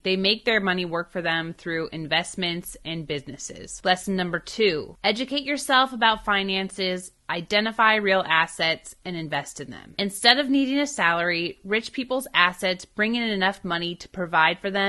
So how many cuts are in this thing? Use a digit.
0